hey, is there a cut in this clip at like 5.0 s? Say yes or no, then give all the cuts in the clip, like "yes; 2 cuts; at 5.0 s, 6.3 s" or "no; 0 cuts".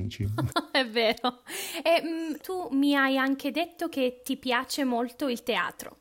no; 1 cut; at 2.4 s